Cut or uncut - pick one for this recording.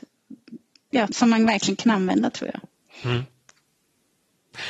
cut